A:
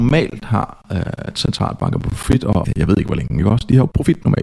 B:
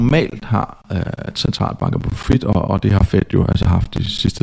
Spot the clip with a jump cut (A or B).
A